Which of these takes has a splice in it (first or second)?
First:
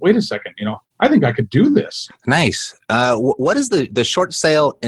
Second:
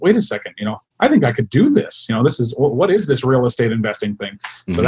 first